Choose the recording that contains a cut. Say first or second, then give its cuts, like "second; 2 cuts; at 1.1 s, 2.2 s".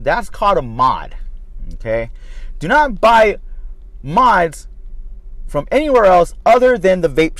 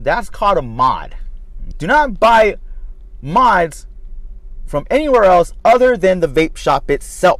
second; 1 cut; at 1.7 s